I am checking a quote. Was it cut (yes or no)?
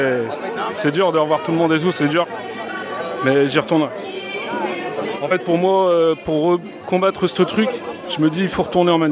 no